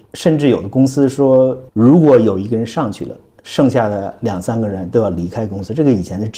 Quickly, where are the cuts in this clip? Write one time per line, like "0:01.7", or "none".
0:01.7